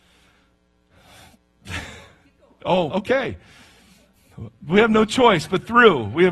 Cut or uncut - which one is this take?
cut